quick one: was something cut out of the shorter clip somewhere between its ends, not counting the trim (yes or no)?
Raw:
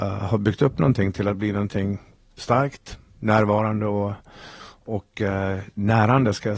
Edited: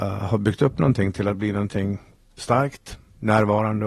no